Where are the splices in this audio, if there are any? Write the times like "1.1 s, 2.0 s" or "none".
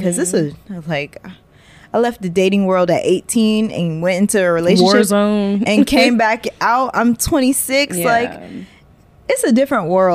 none